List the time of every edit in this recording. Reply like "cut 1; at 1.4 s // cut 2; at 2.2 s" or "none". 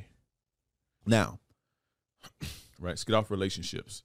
cut 1; at 1.0 s // cut 2; at 2.8 s